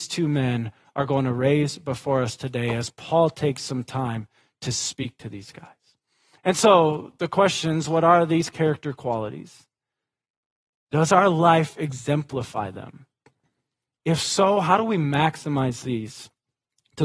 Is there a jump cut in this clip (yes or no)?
no